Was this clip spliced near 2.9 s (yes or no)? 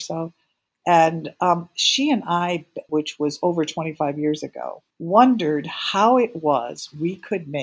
yes